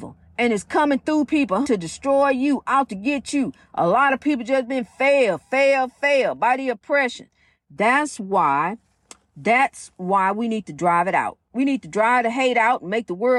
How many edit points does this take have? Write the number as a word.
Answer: one